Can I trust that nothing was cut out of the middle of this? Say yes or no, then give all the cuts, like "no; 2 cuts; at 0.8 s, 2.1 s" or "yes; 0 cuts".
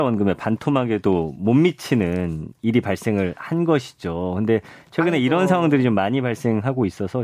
yes; 0 cuts